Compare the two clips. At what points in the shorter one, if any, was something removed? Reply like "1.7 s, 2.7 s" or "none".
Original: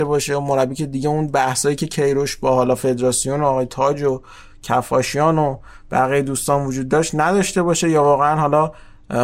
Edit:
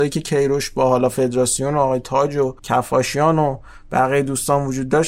2.6 s